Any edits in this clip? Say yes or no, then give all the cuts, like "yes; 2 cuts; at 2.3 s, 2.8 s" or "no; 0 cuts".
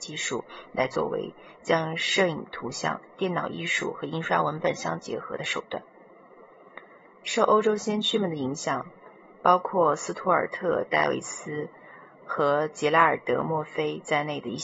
yes; 1 cut; at 7.1 s